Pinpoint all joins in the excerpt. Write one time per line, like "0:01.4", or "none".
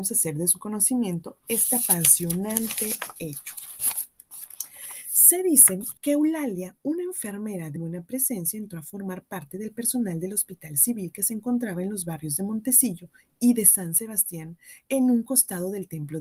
0:06.0
0:07.8